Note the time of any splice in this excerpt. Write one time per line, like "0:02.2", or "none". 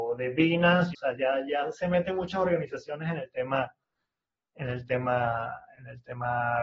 0:00.9